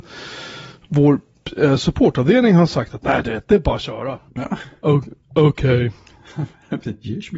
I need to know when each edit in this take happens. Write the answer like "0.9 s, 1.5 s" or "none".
4.3 s